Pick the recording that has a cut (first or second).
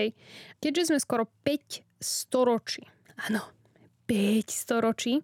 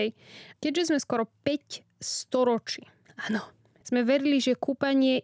second